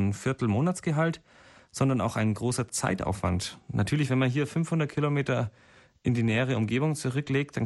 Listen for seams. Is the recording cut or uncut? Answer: uncut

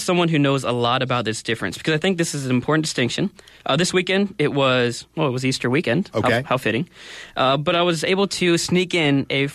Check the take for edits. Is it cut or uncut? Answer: uncut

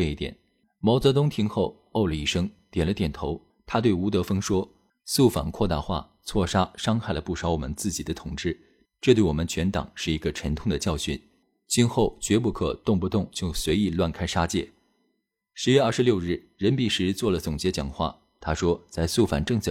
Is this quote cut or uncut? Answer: uncut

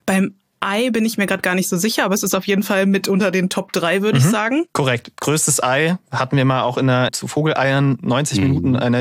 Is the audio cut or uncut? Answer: cut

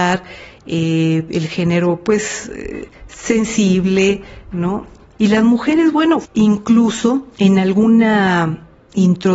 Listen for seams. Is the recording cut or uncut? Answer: cut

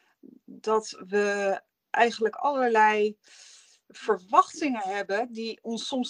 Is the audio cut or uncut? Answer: uncut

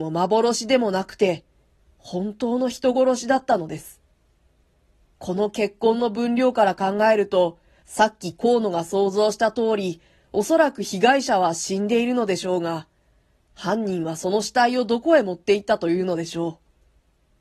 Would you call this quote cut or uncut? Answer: uncut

